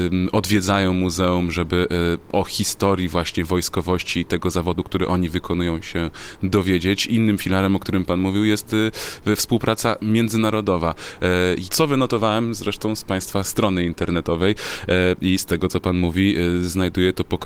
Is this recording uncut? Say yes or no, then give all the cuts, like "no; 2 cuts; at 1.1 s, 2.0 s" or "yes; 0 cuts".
no; 1 cut; at 11.6 s